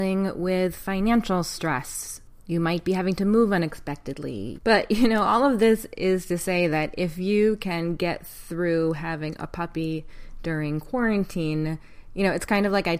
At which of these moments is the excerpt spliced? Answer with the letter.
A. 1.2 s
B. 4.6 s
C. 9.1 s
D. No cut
B